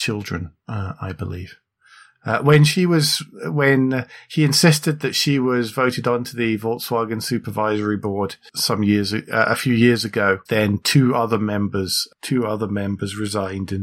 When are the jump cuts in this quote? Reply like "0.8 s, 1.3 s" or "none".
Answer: none